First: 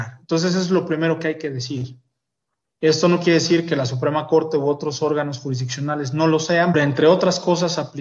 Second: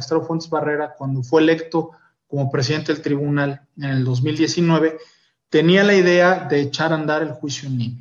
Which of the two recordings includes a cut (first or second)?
first